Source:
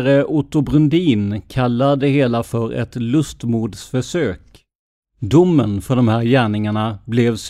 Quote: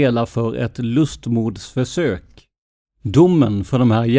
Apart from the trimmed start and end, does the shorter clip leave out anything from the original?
no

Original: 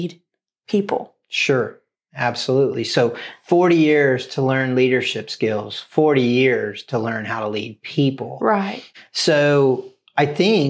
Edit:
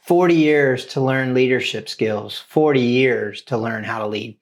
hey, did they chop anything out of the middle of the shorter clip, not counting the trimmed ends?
no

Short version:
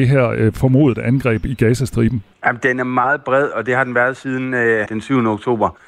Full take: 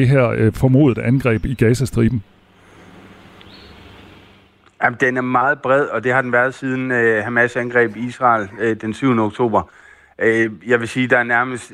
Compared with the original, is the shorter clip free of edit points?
no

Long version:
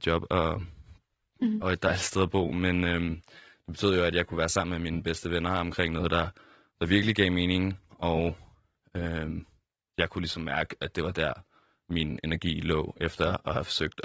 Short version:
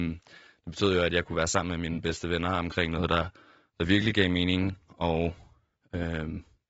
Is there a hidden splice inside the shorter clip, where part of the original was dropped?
no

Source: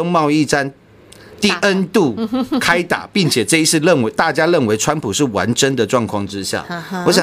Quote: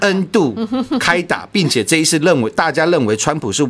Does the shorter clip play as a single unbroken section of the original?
yes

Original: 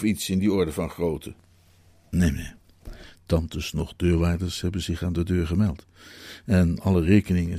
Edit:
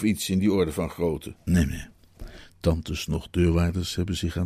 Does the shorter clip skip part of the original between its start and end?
yes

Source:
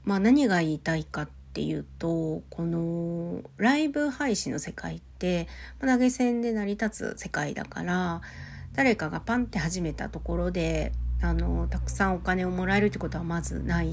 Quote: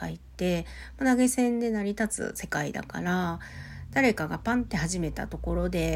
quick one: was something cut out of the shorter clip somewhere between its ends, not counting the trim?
no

